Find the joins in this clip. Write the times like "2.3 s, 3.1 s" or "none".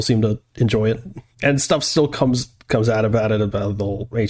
1.3 s